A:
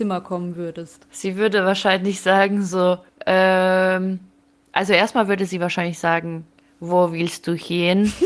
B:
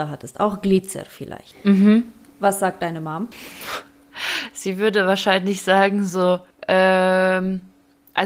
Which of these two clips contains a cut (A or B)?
A